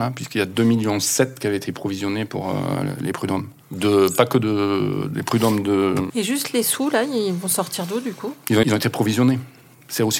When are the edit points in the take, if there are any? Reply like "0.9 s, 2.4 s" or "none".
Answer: 6.1 s, 8.6 s